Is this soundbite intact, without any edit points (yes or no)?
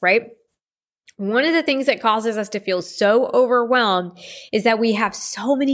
yes